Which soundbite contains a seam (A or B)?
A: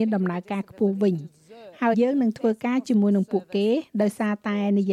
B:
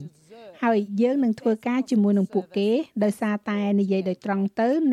A